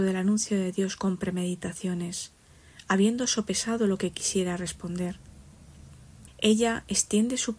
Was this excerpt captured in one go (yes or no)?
no